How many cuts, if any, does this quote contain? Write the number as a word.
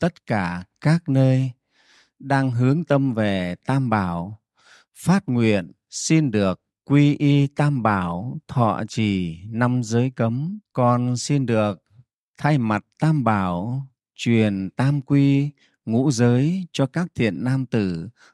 one